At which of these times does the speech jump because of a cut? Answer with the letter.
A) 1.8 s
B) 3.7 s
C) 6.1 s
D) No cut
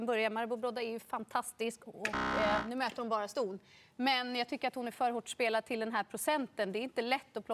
D